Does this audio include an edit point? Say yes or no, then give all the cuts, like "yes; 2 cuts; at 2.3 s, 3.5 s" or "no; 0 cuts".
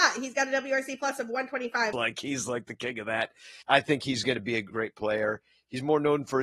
yes; 3 cuts; at 1.9 s, 3.6 s, 4.7 s